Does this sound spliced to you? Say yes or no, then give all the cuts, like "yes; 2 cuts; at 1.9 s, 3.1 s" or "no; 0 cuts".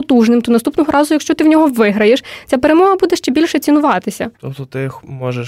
yes; 1 cut; at 4.3 s